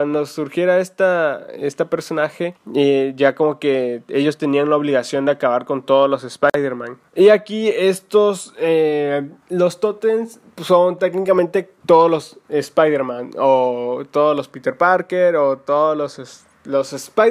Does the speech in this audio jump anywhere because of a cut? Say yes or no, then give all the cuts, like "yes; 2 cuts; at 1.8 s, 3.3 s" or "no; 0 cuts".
yes; 1 cut; at 7.1 s